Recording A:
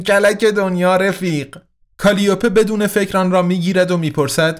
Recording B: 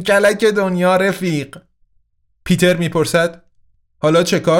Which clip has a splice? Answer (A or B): A